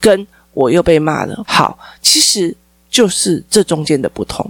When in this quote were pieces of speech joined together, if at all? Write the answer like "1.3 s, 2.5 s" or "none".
1.5 s

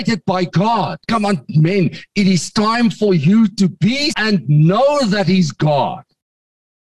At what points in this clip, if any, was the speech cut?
1.0 s, 4.1 s

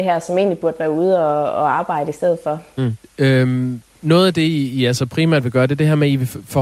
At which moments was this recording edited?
3.0 s

